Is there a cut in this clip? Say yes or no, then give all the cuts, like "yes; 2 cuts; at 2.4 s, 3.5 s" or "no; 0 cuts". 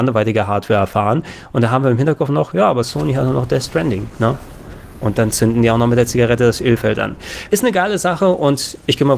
yes; 1 cut; at 7.5 s